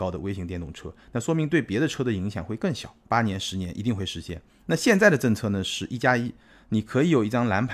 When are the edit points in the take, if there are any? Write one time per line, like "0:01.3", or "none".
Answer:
0:03.0